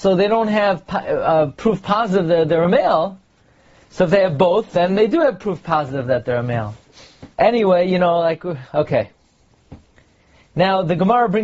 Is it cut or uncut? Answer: cut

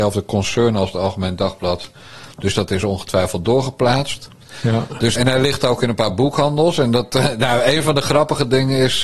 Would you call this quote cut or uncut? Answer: cut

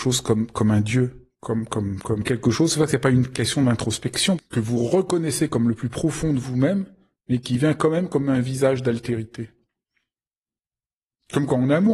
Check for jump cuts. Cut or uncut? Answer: cut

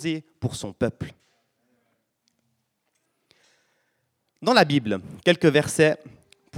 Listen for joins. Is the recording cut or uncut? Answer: uncut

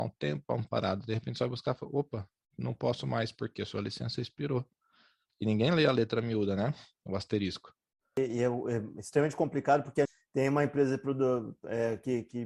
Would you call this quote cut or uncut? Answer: uncut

